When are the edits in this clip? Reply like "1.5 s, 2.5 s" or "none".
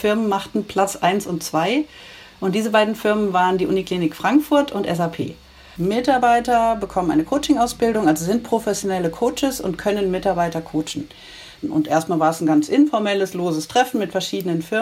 5.7 s, 11.6 s